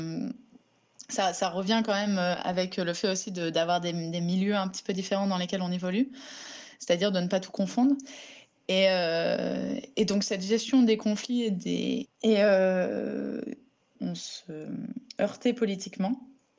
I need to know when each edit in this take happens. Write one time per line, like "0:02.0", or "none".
0:12.1
0:13.9